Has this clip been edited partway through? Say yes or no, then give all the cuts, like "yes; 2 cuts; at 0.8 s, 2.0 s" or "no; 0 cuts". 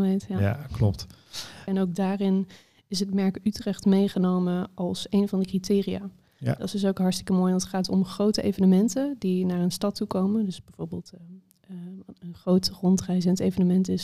yes; 1 cut; at 1.7 s